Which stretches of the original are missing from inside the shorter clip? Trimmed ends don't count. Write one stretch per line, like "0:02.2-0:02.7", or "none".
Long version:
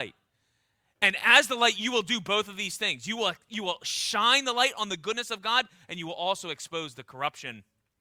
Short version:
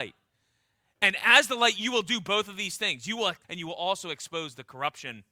0:03.4-0:05.8